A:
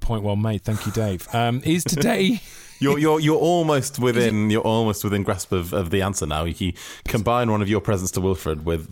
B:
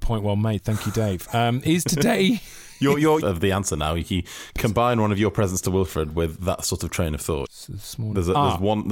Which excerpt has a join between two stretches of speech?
B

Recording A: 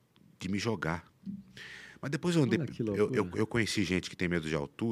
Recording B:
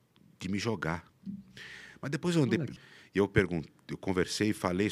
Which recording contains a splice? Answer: B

